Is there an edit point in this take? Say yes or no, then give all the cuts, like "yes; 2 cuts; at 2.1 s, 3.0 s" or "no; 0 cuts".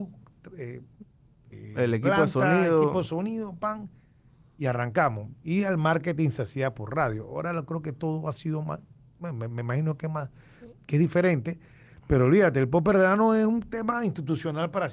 no; 0 cuts